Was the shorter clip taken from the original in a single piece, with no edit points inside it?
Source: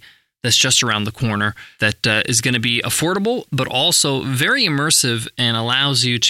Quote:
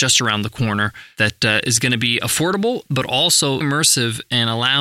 no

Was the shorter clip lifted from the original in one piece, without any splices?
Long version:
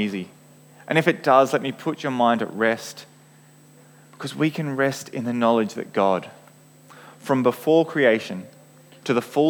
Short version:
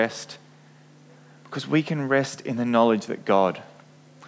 yes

